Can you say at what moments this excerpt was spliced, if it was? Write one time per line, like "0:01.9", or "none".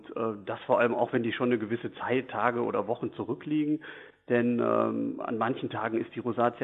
none